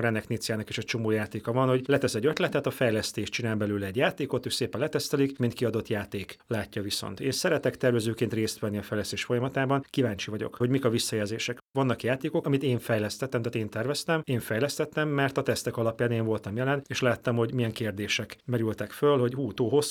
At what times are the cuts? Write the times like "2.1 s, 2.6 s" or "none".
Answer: 5.4 s

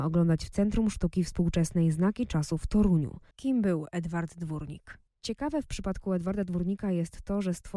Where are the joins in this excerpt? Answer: 3.3 s, 5.1 s

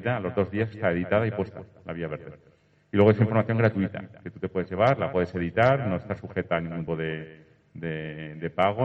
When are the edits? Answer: 6.9 s

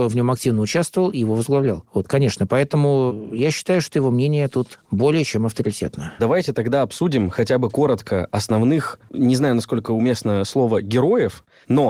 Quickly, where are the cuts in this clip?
6.2 s, 9.1 s

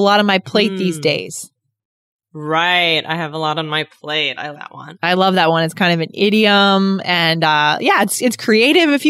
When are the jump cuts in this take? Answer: 4.5 s

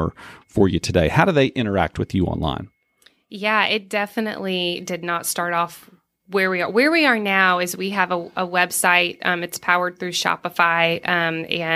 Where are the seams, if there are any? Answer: none

